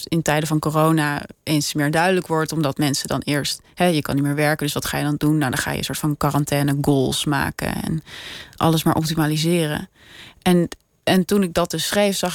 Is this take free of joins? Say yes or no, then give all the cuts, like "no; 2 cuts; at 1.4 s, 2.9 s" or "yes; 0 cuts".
yes; 0 cuts